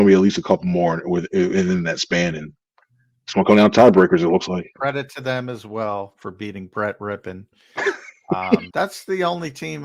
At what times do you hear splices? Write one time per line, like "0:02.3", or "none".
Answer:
0:04.8
0:08.7